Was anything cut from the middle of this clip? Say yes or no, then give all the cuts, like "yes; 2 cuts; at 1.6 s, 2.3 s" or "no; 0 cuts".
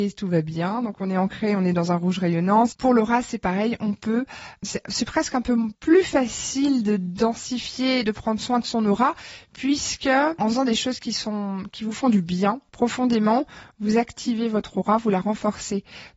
yes; 1 cut; at 2.7 s